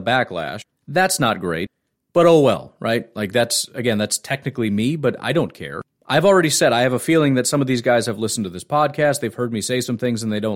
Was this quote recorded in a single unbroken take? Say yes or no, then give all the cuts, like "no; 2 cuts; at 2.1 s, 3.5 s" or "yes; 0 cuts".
yes; 0 cuts